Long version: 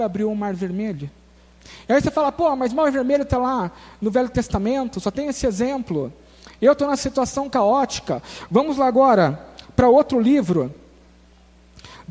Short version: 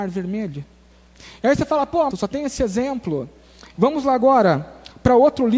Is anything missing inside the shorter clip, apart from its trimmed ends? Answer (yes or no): yes